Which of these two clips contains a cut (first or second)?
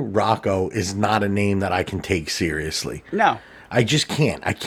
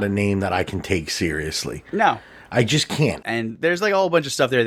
second